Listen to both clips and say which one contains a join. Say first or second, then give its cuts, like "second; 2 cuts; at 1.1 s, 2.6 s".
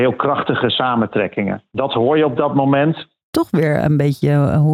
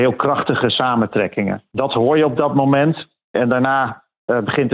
first; 1 cut; at 3.2 s